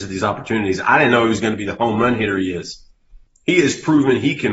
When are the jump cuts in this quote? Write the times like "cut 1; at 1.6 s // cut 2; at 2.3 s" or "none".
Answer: cut 1; at 3.3 s